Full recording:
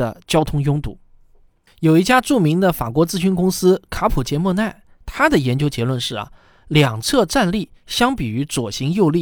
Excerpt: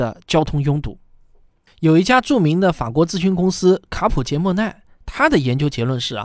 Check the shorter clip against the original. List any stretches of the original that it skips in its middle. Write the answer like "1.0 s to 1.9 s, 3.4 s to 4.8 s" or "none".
none